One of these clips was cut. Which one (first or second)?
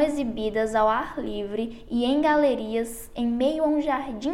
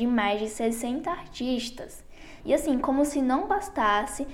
second